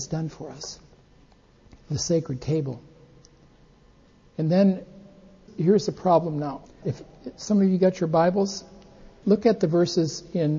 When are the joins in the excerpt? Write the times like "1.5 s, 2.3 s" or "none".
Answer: 6.8 s